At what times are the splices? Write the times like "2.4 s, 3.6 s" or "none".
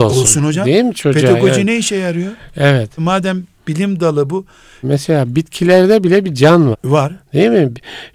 3.0 s, 4.8 s, 6.7 s